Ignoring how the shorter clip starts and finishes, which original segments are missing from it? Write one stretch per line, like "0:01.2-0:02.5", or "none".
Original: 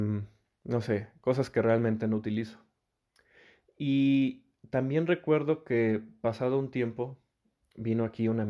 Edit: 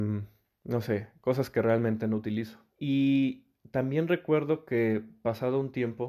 0:02.7-0:03.7